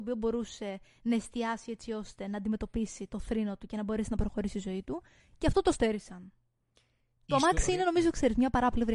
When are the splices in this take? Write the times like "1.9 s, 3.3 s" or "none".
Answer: none